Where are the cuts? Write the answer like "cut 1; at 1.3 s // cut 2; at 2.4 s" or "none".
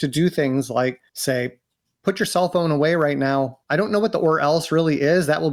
cut 1; at 1.1 s // cut 2; at 3.6 s